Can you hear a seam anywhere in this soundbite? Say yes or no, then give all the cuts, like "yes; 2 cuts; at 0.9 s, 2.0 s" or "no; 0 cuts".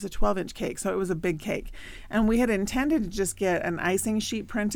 no; 0 cuts